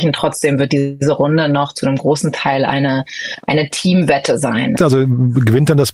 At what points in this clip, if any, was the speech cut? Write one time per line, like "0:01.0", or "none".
0:04.8

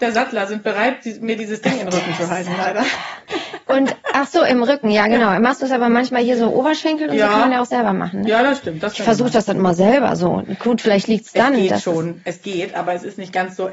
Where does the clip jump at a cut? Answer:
none

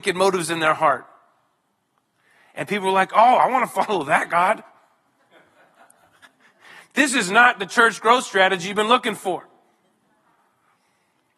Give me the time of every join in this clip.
none

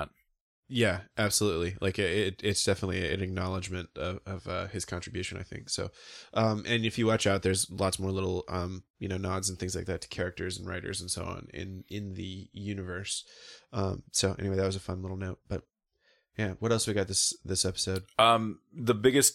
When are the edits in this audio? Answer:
none

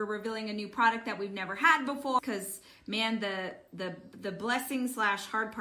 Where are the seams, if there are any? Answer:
0:02.2

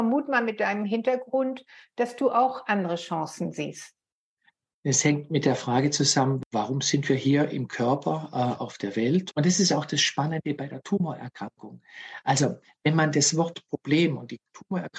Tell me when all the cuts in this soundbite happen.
0:09.3

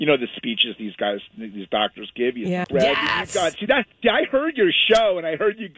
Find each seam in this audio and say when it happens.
0:02.6

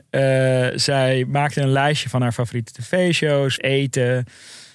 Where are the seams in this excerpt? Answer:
0:03.6

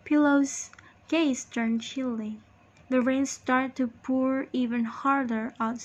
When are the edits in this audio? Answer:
0:02.8

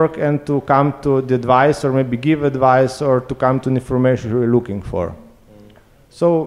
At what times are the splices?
none

